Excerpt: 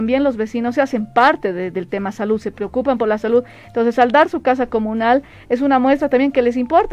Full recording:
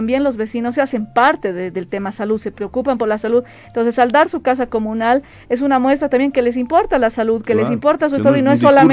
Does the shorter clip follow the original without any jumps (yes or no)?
yes